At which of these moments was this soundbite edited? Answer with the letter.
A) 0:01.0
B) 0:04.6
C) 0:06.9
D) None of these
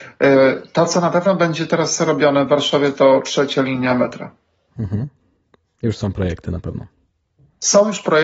D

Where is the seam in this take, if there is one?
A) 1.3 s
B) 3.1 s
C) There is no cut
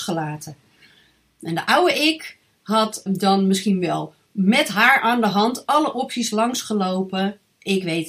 B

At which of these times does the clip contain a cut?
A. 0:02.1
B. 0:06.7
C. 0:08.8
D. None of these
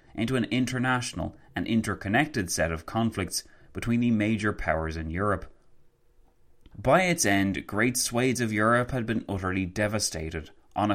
B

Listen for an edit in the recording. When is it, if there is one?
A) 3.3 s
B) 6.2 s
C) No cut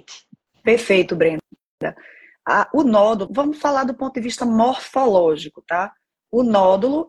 A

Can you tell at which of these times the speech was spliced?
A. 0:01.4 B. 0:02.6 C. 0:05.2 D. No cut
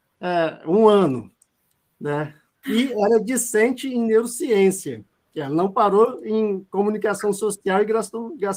B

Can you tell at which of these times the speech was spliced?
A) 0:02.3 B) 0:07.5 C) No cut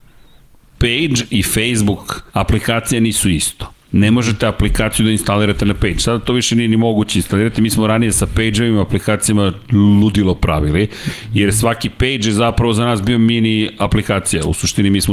A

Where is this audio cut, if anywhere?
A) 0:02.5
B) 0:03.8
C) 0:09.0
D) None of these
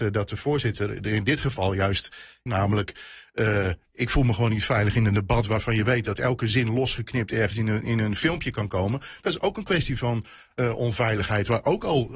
A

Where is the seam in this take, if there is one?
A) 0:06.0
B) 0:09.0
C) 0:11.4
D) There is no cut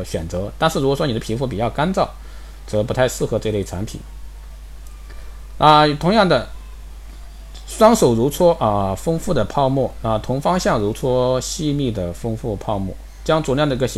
D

